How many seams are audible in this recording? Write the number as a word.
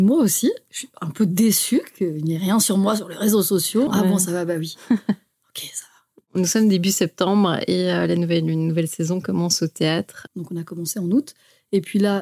two